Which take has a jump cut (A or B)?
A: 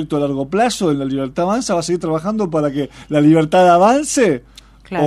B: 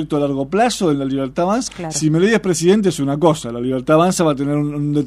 B